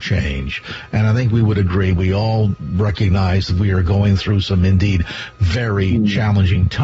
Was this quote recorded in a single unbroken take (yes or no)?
yes